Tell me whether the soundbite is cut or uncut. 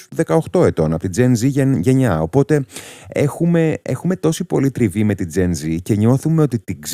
uncut